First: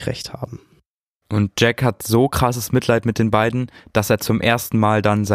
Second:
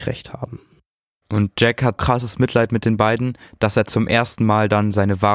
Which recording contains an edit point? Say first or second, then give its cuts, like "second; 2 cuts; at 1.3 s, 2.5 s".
second; 1 cut; at 2.0 s